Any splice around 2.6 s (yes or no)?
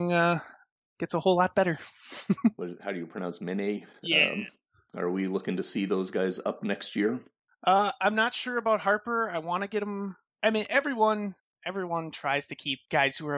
yes